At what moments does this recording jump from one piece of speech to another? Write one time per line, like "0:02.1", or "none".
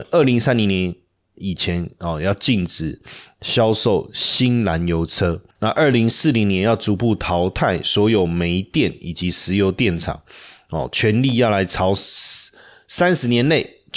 0:05.6